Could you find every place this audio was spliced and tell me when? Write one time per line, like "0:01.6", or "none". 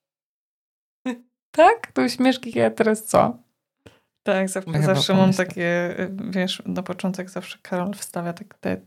0:02.5
0:04.7